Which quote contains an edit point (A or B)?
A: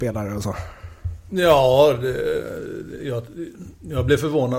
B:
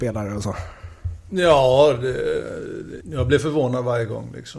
B